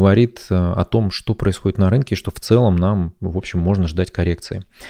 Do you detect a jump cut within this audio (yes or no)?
no